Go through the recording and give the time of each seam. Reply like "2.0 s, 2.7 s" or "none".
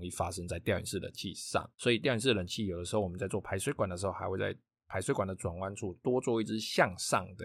1.7 s